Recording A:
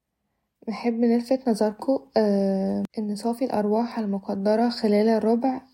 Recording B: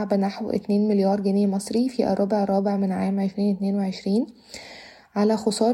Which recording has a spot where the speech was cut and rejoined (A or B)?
A